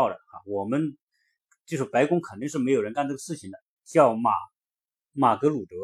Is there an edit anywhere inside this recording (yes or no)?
yes